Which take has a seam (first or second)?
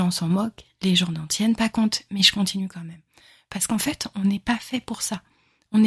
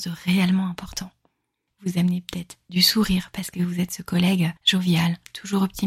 second